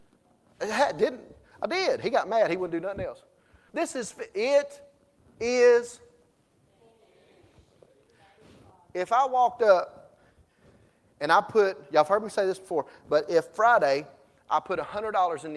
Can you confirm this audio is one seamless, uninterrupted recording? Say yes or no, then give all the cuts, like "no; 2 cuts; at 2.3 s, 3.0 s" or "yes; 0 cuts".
no; 1 cut; at 3.7 s